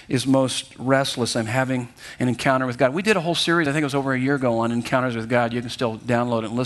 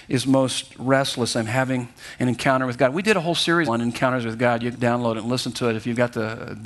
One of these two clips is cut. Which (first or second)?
second